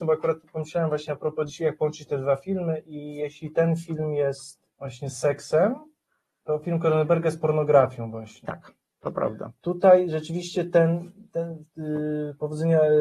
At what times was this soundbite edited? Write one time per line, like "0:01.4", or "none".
0:04.7